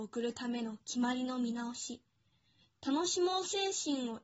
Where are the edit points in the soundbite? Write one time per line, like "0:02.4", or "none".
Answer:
none